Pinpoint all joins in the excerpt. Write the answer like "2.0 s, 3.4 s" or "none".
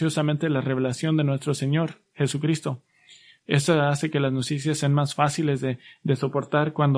3.4 s